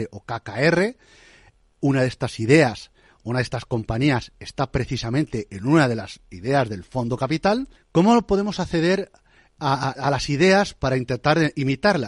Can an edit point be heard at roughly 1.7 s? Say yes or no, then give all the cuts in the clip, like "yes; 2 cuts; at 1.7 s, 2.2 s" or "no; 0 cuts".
no; 2 cuts; at 7.8 s, 9.9 s